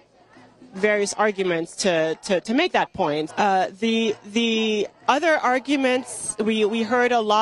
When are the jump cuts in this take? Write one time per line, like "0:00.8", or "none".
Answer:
0:03.3